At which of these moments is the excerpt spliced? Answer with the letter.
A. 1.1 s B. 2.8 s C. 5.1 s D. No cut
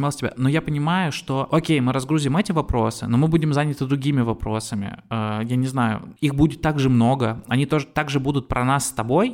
D